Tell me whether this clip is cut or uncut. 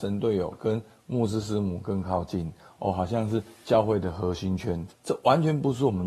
cut